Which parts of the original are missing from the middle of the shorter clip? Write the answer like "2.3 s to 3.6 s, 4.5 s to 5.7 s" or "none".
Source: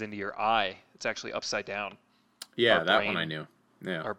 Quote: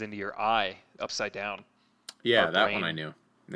1.0 s to 1.3 s